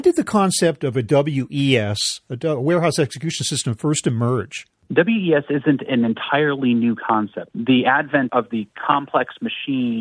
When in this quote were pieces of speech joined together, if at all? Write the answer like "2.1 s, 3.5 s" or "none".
7.5 s